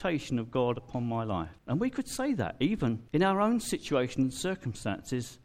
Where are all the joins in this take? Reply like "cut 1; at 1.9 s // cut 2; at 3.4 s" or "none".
cut 1; at 1.6 s // cut 2; at 3.1 s